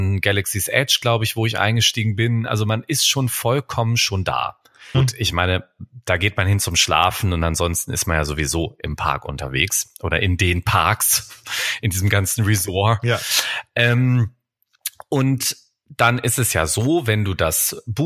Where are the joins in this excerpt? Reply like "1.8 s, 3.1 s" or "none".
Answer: 4.9 s